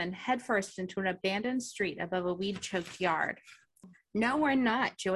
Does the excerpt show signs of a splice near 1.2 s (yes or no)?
no